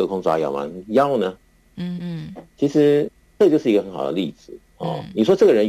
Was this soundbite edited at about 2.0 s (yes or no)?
yes